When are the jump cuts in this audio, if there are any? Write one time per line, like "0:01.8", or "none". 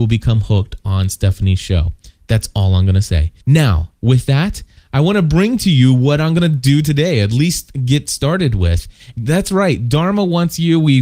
0:03.4
0:09.1